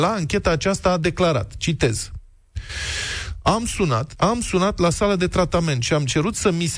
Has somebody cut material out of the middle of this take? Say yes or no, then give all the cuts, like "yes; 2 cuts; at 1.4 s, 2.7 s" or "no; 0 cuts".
yes; 1 cut; at 4.2 s